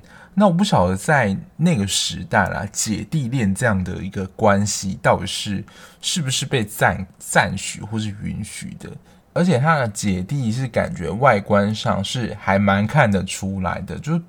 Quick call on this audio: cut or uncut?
uncut